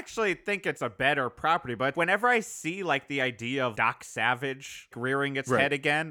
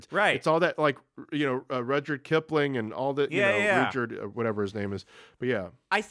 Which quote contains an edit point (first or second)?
first